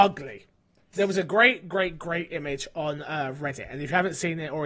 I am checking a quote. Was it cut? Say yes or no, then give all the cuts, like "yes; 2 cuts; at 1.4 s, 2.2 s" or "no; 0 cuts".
yes; 1 cut; at 0.9 s